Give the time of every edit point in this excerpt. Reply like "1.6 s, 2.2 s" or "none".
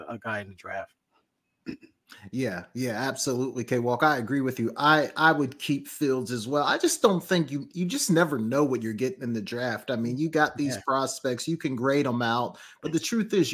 none